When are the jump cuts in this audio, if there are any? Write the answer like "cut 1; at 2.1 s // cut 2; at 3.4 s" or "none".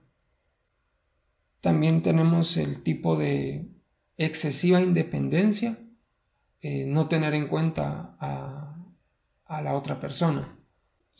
none

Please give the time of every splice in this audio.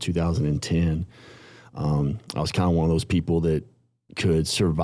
none

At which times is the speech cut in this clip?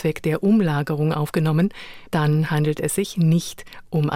cut 1; at 2.1 s

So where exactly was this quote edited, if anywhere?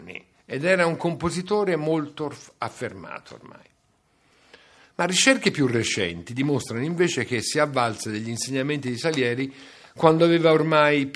cut 1; at 4.8 s

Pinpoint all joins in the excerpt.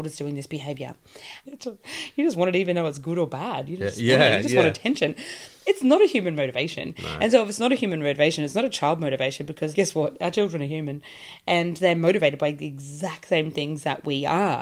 cut 1; at 1.4 s // cut 2; at 9.7 s

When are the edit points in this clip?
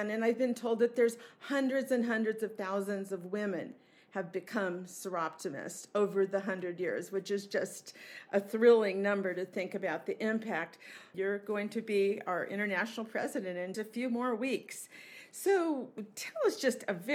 cut 1; at 11.1 s // cut 2; at 13.7 s

